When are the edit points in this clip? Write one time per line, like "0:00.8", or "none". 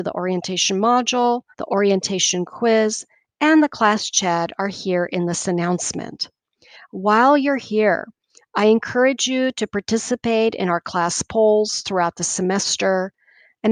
0:01.5

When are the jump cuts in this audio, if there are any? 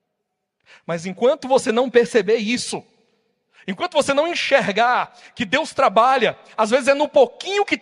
none

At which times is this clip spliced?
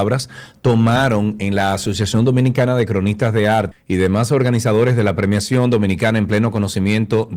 0:03.7

